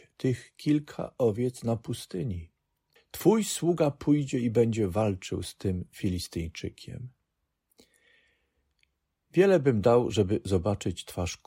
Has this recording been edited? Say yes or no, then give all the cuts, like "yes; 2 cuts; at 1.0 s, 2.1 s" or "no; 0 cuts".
yes; 1 cut; at 3.0 s